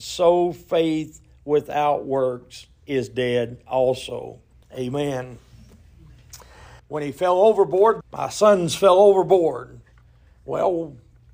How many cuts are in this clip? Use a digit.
3